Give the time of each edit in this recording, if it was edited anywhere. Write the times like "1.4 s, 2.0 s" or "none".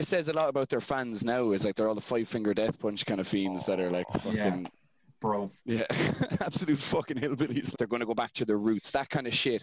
5.6 s, 7.7 s